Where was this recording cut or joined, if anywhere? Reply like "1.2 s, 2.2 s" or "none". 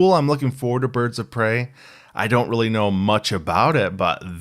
none